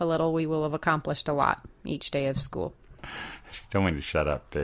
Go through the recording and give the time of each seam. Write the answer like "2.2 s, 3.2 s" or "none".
3.0 s